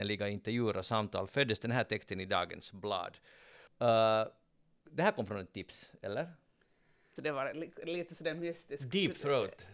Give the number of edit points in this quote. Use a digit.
2